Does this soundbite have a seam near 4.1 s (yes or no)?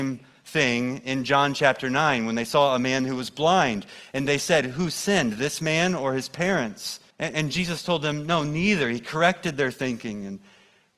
no